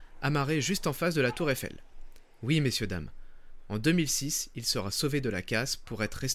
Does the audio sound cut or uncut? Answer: uncut